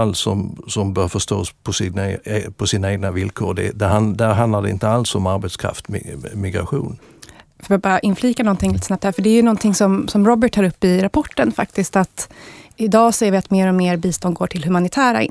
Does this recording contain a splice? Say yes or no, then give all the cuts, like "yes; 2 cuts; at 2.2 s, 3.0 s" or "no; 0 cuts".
no; 0 cuts